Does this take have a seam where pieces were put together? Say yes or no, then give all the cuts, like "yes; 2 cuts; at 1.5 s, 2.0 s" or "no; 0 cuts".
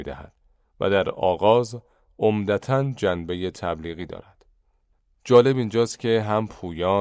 no; 0 cuts